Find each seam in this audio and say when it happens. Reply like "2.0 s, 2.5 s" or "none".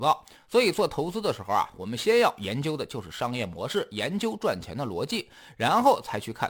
none